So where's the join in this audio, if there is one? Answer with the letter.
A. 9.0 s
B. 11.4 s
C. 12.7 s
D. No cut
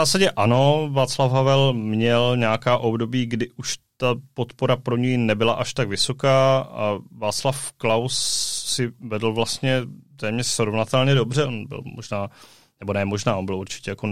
B